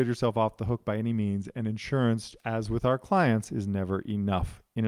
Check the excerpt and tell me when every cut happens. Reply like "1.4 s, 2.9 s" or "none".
none